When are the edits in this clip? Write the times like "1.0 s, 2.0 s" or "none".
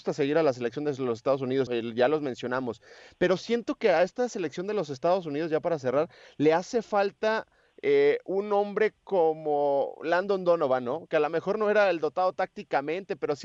1.7 s